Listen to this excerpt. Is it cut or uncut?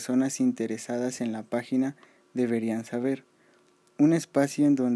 uncut